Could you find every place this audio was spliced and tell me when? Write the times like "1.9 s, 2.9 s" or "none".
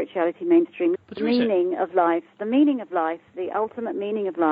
0.9 s